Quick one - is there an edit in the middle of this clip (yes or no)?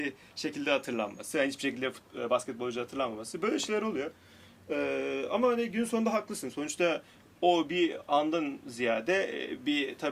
no